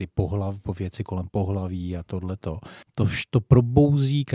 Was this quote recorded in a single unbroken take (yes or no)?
no